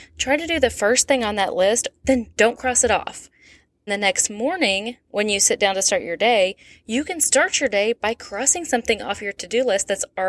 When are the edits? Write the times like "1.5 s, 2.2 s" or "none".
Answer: 2.0 s, 3.9 s